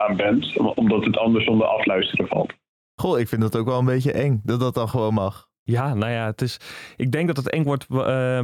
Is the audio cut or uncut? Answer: uncut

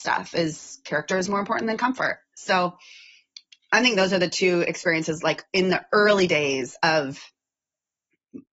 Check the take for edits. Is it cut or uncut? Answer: uncut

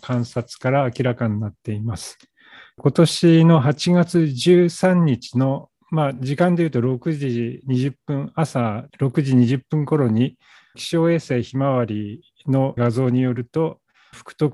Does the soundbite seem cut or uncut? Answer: uncut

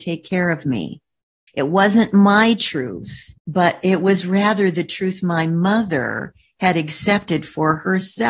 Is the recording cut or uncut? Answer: cut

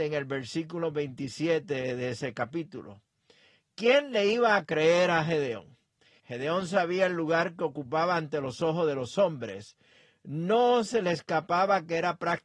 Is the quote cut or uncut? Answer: cut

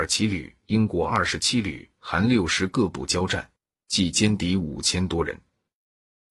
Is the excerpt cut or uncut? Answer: uncut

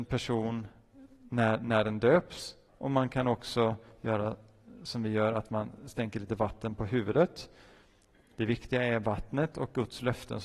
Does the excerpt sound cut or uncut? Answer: cut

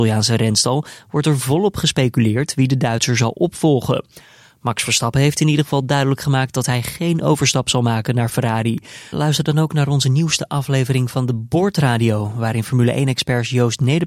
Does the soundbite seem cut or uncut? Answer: cut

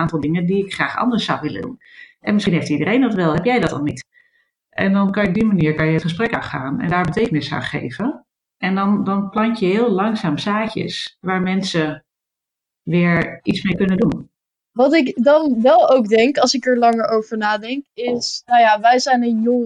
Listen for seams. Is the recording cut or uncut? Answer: uncut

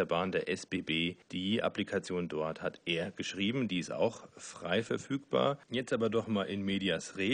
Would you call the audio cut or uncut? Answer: cut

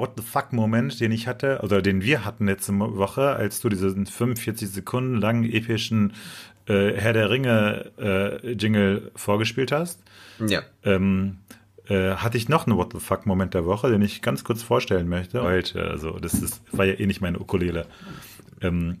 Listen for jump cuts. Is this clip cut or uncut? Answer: cut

